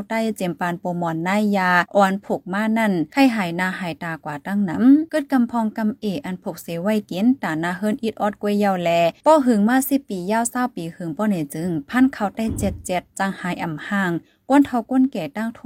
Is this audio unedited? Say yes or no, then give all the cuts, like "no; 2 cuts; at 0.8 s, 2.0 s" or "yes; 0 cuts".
yes; 0 cuts